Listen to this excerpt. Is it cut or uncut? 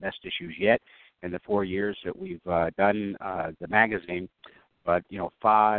uncut